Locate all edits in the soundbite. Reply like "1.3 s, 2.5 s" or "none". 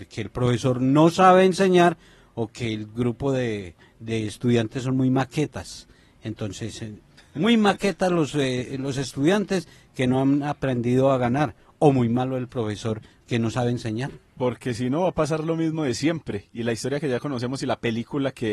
none